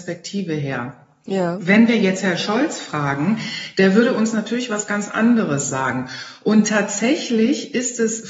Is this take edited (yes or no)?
no